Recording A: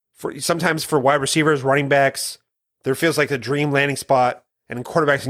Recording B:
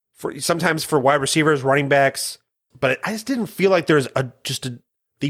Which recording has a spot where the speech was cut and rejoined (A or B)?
B